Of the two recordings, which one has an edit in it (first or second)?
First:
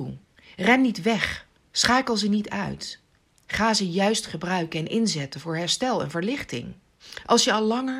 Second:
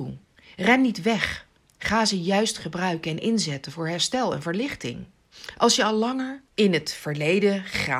second